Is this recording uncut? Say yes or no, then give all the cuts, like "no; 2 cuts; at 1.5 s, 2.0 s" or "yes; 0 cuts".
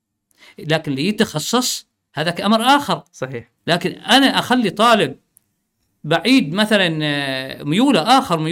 no; 1 cut; at 3.6 s